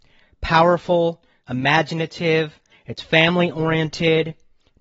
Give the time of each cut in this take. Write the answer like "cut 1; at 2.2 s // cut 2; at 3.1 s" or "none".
cut 1; at 1.4 s // cut 2; at 2.7 s